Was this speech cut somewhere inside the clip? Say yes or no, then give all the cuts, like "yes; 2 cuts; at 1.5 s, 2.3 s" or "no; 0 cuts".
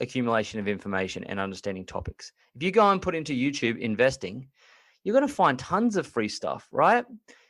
no; 0 cuts